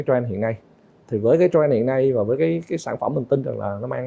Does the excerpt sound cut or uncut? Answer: uncut